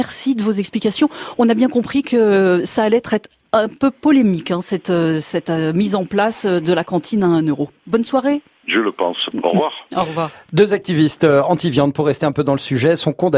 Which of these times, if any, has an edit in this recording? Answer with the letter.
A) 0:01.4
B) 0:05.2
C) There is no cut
C